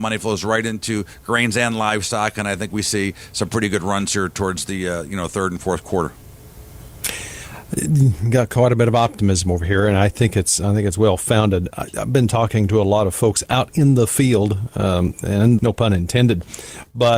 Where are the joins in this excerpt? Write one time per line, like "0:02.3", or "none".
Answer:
0:15.6